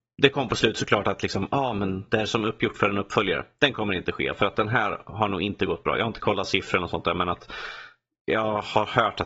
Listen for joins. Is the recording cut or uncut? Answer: uncut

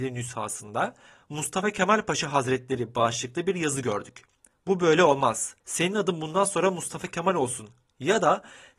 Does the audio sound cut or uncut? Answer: cut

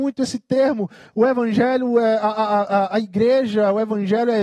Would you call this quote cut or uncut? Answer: uncut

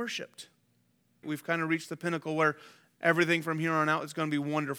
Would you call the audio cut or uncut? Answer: cut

